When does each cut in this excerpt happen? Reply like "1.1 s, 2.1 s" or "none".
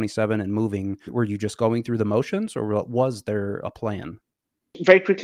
1.1 s